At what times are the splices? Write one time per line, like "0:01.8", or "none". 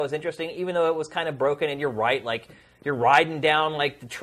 none